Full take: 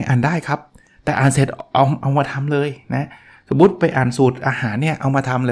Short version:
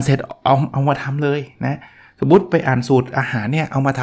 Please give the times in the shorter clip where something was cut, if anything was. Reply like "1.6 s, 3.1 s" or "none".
none